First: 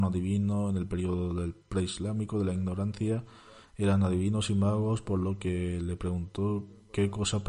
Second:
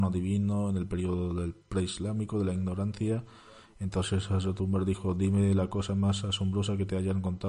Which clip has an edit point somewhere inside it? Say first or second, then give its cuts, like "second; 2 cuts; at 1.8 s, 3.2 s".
first; 1 cut; at 3.6 s